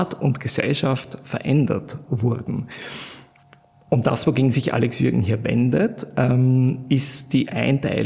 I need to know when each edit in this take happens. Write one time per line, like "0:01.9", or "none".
0:02.1